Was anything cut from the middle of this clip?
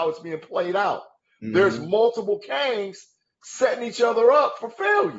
no; 0 cuts

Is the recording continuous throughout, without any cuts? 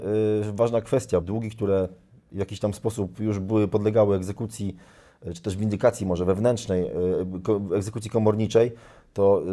no; 1 cut; at 1.2 s

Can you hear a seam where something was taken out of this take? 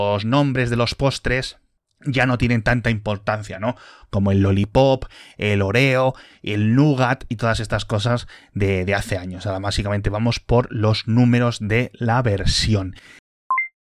no; 0 cuts

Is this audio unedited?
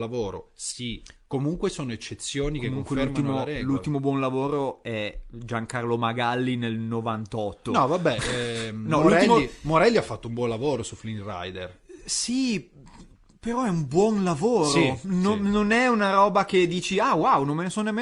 yes; 0 cuts

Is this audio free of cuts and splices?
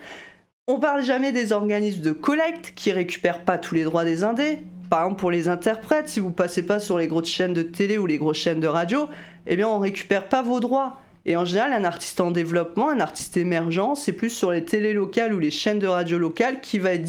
yes; 0 cuts

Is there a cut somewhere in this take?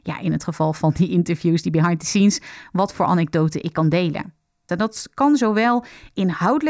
yes; 1 cut; at 4.7 s

